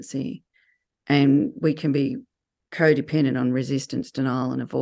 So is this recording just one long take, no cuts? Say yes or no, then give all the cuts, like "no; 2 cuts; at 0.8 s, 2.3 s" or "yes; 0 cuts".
yes; 0 cuts